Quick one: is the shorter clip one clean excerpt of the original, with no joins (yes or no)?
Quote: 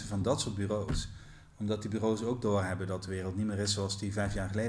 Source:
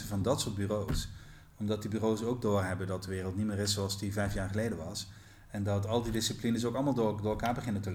yes